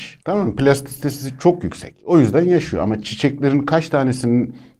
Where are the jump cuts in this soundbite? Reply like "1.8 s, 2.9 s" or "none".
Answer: none